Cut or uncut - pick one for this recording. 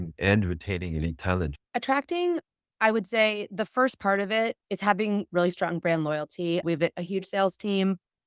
cut